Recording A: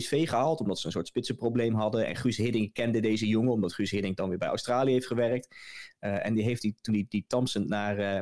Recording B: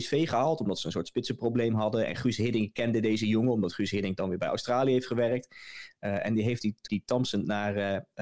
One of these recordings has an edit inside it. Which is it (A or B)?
B